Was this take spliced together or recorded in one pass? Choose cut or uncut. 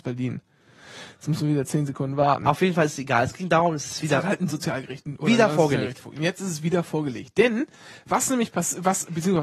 uncut